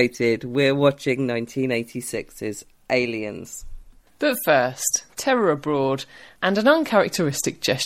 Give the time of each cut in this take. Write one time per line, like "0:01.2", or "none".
0:05.1